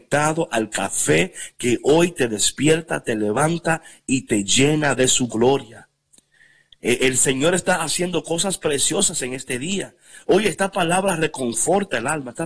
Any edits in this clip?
no; 0 cuts

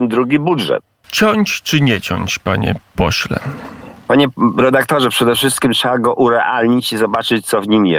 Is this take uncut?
no; 1 cut; at 1.0 s

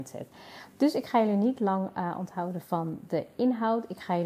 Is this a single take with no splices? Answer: yes; 0 cuts

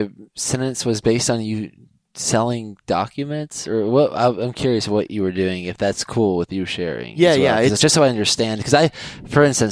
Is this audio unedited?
yes; 0 cuts

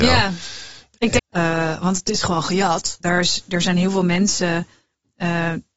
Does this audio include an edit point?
yes; 2 cuts; at 1.2 s, 3.0 s

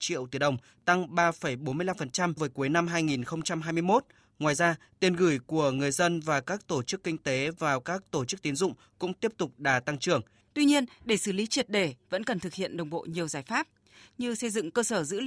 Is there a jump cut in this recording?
yes; 2 cuts; at 2.4 s, 10.4 s

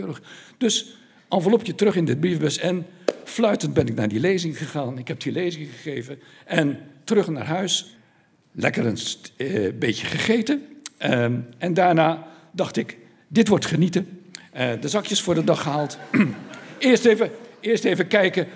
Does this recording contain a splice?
no; 0 cuts

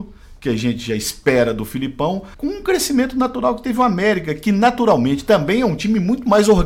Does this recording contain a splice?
yes; 1 cut; at 2.3 s

